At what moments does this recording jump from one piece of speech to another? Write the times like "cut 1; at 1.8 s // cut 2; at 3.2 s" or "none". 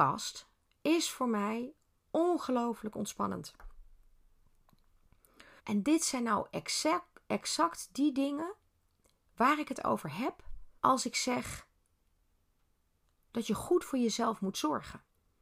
cut 1; at 5.6 s // cut 2; at 10.8 s